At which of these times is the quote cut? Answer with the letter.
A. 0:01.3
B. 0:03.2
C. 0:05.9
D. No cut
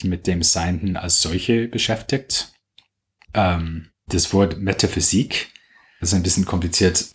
B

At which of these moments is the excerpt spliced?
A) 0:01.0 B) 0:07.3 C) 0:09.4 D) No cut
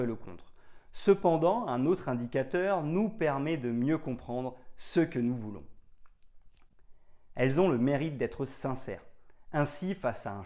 B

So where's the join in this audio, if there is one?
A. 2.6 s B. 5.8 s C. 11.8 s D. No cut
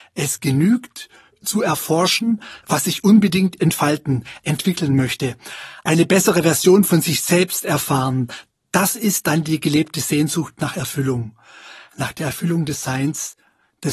A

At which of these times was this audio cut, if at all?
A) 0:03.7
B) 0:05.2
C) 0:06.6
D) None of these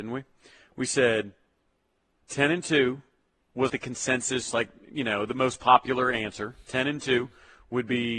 A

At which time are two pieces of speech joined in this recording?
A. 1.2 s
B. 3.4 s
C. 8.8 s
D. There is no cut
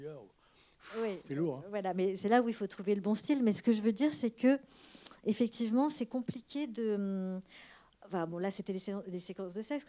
A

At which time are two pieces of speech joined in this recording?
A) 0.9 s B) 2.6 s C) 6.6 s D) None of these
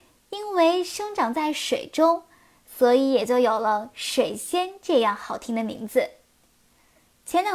D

